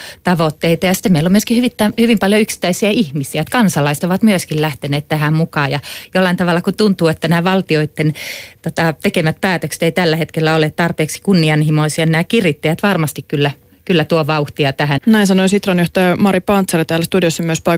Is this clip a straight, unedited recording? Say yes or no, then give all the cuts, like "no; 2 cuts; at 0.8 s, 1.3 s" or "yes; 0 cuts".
no; 1 cut; at 15.0 s